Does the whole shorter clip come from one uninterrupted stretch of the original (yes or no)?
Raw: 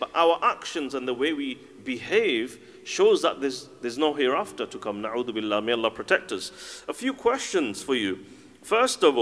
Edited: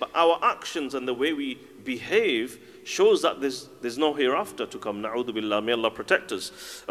yes